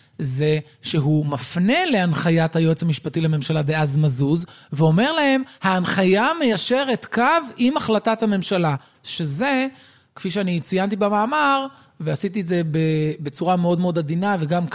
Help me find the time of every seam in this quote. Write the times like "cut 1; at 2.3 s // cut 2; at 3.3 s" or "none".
none